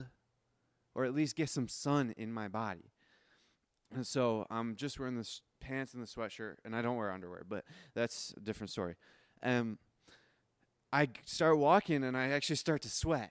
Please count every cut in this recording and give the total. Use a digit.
2